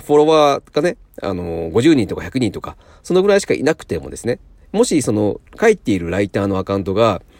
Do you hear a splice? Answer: no; 0 cuts

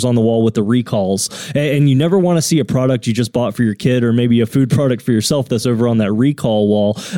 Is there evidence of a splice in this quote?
no; 0 cuts

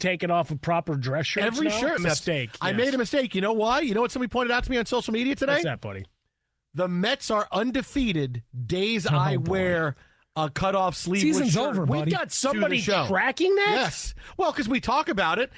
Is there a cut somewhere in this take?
yes; 1 cut; at 2.0 s

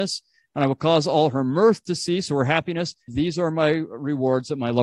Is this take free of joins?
no; 1 cut; at 3.1 s

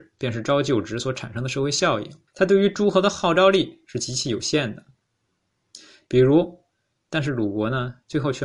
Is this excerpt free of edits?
no; 2 cuts; at 2.3 s, 7.1 s

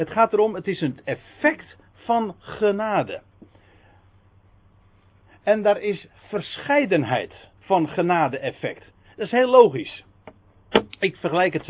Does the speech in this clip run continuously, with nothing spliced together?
no; 1 cut; at 7.6 s

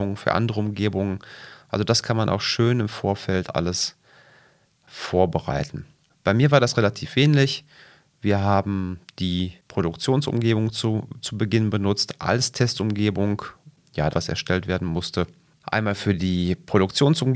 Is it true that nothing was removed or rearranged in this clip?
no; 1 cut; at 14.1 s

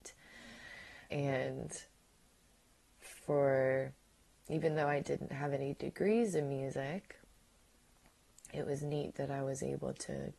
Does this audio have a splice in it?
yes; 1 cut; at 1.1 s

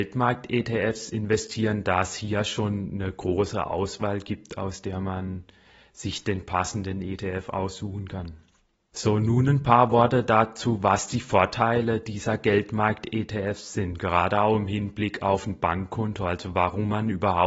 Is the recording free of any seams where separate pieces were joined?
yes; 0 cuts

